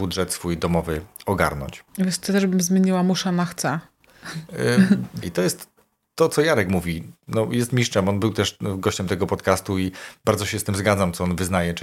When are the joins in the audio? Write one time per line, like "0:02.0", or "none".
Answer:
0:01.9
0:05.2